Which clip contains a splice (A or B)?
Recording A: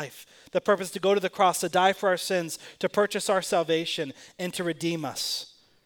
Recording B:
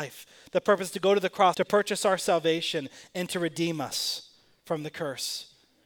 B